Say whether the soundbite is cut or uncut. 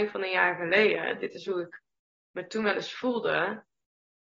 uncut